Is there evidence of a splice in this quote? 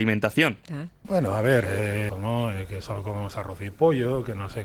yes; 2 cuts; at 1.0 s, 2.1 s

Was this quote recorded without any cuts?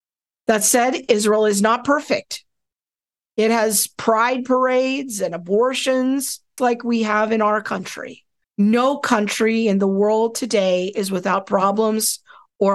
no; 2 cuts; at 6.6 s, 8.4 s

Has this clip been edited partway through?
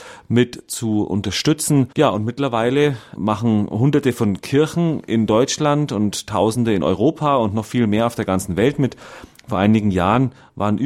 yes; 2 cuts; at 1.9 s, 3.2 s

